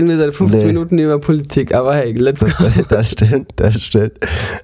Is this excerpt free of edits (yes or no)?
yes